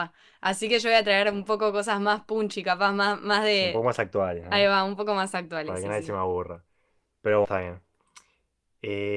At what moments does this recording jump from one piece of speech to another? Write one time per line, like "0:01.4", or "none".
0:07.4